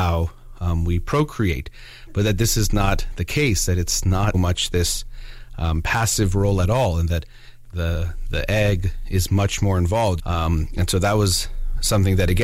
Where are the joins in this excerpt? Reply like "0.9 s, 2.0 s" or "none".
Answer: 4.3 s, 10.2 s